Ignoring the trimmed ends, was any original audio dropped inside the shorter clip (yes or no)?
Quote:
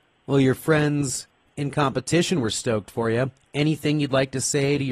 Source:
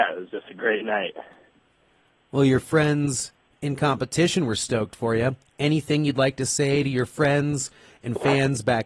no